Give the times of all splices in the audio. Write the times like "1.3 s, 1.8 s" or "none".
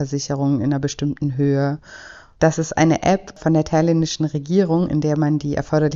2.3 s